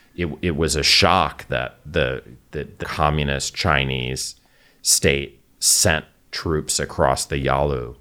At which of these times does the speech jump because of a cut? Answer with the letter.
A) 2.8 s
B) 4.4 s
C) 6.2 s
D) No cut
A